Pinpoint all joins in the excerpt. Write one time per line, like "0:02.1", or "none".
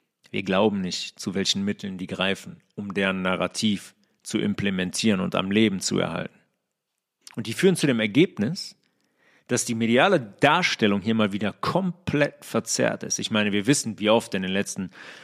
0:07.2